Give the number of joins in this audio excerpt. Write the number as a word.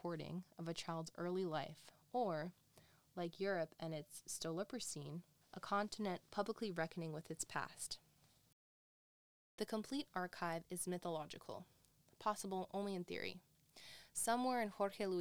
one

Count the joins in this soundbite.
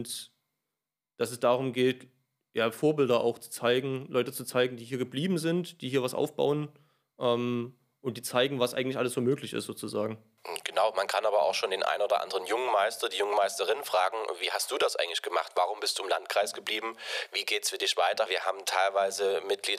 one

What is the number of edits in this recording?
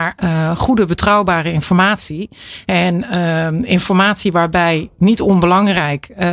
zero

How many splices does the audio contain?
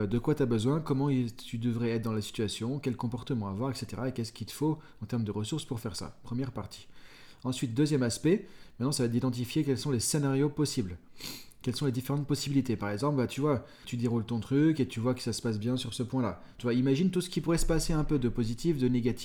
two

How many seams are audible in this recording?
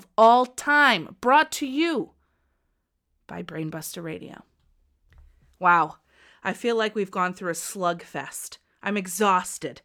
zero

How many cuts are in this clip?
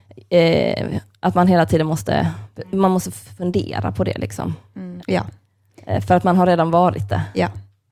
one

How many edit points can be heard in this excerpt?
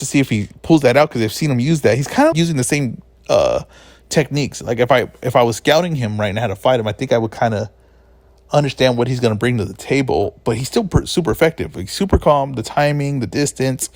one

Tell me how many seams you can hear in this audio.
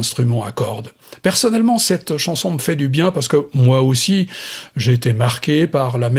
zero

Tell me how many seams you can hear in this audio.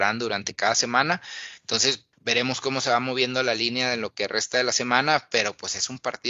one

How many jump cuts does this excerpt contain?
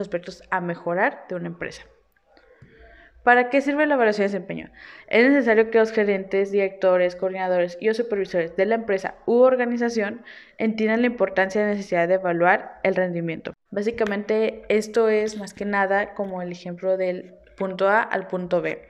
two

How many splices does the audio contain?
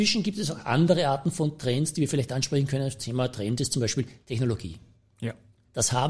zero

